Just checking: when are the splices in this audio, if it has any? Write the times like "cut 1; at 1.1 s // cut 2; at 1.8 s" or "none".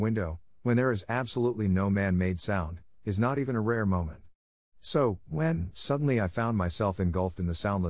none